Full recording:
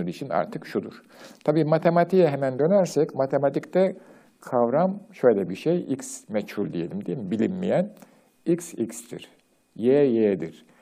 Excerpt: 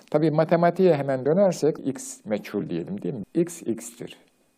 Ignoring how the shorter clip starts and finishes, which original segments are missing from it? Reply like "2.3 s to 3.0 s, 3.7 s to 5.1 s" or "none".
3.1 s to 5.8 s, 7.3 s to 8.3 s